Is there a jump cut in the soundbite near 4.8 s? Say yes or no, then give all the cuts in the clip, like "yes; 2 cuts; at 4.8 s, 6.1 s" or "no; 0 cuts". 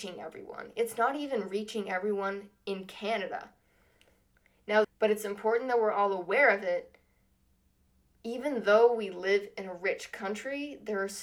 yes; 1 cut; at 4.8 s